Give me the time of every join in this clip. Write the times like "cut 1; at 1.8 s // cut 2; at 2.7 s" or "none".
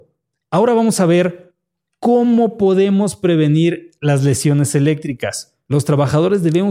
cut 1; at 5.7 s